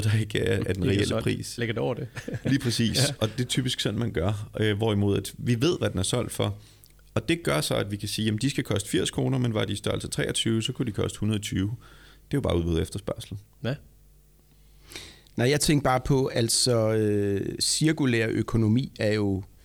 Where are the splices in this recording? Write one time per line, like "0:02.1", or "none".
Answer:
0:01.6